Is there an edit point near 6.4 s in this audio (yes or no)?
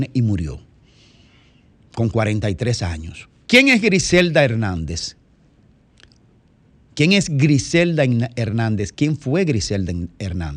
no